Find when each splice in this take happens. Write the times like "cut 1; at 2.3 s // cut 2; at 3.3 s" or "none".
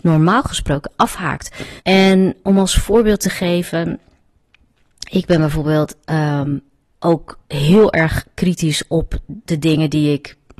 cut 1; at 1.8 s // cut 2; at 7.4 s